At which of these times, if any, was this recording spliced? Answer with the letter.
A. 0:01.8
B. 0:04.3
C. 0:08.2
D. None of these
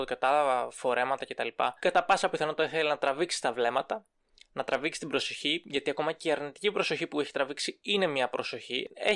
A